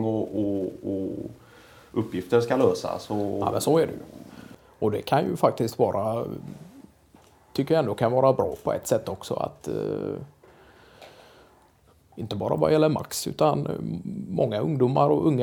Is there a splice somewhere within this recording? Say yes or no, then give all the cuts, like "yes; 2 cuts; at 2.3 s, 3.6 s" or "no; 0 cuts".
no; 0 cuts